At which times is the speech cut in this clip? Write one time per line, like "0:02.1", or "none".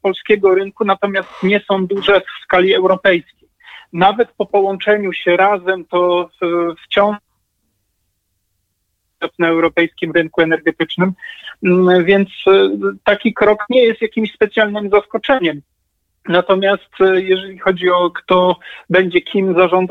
none